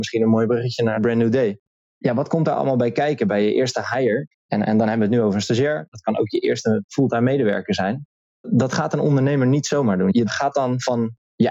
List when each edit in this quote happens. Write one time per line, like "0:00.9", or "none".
0:04.3